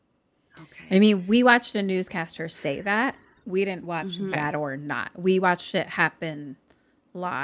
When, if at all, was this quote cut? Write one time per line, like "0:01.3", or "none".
0:04.3